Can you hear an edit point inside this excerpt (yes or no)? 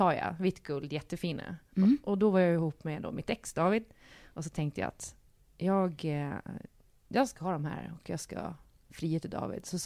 no